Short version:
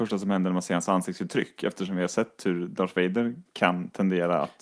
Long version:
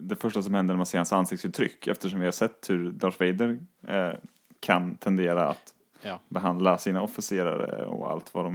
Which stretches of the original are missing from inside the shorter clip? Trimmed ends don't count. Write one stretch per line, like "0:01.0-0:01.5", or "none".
0:03.7-0:04.5